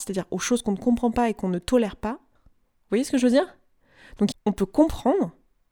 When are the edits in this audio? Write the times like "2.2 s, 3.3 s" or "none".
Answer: 2.4 s, 4.3 s